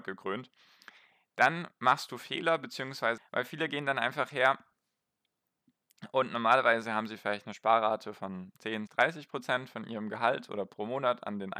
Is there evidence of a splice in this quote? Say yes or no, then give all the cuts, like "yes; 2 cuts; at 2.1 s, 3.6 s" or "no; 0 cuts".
yes; 2 cuts; at 3.2 s, 8.9 s